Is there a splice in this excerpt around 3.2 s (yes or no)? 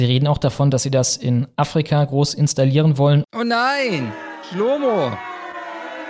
yes